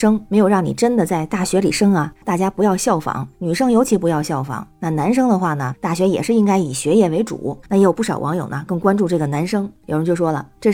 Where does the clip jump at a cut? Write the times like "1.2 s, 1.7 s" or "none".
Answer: 7.6 s